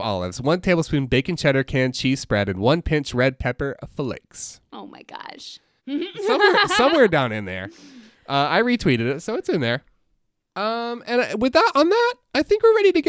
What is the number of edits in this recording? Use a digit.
1